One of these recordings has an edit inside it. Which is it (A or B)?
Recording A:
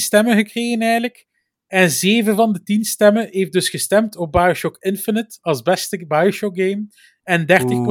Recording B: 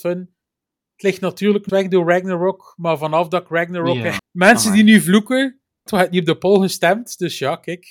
B